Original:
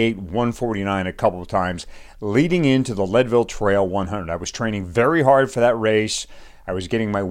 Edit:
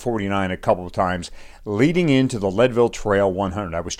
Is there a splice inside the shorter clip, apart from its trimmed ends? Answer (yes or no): no